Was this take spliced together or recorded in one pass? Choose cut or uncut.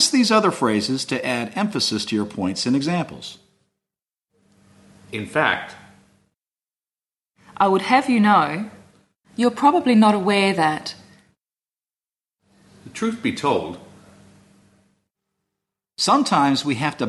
cut